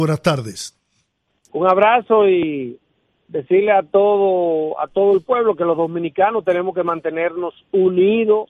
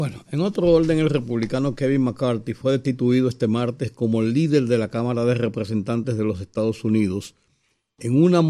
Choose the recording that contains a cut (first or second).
first